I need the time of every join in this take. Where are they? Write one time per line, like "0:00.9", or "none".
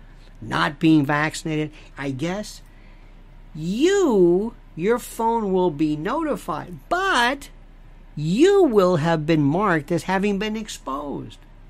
0:01.9